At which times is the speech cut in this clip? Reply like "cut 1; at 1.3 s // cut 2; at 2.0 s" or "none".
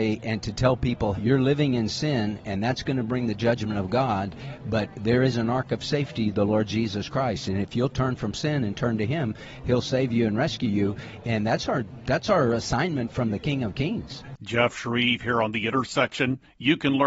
cut 1; at 1.1 s